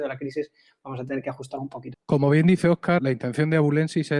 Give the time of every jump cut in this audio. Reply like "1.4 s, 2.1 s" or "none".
1.9 s, 3.0 s

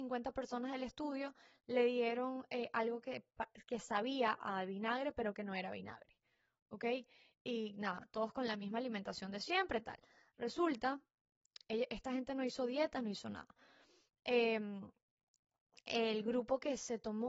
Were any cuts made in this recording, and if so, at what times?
none

